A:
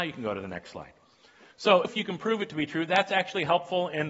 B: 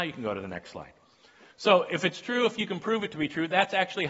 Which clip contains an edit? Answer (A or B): A